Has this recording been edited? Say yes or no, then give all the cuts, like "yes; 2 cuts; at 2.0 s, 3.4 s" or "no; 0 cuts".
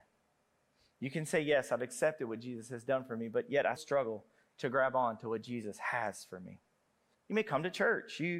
yes; 2 cuts; at 3.8 s, 7.1 s